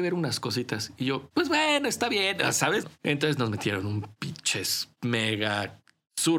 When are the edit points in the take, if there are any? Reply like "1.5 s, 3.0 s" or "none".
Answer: 2.8 s

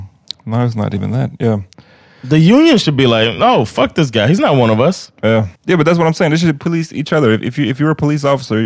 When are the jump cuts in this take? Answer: 5.6 s

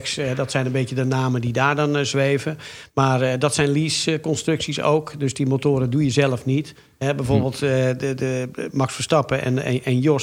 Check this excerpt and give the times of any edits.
6.9 s

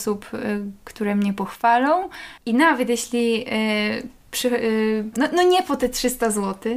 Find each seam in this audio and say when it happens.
2.4 s, 5.1 s

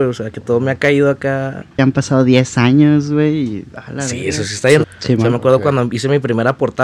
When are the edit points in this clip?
1.8 s, 4.8 s

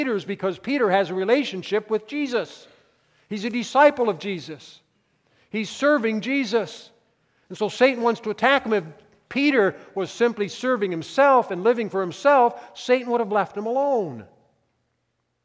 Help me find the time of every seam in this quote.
none

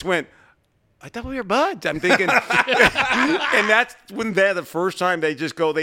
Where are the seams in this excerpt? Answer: none

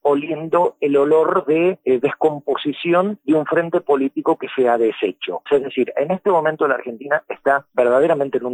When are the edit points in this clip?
5.5 s

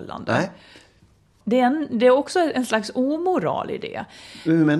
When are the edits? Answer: 1.4 s

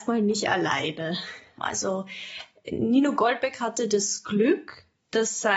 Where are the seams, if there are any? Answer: 1.6 s

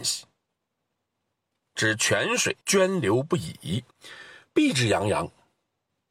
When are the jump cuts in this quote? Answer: 2.6 s, 3.9 s

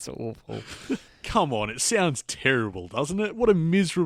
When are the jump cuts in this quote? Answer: 1.1 s

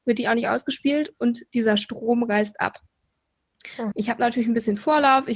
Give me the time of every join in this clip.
3.9 s

